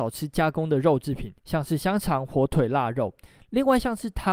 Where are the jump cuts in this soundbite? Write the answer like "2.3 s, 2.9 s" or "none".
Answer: 1.4 s